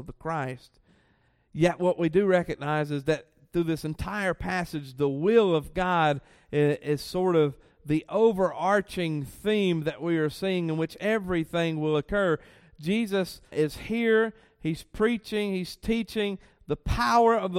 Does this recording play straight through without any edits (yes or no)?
no